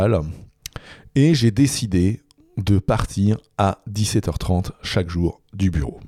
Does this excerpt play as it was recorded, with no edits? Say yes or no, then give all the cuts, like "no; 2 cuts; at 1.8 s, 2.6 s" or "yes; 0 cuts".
yes; 0 cuts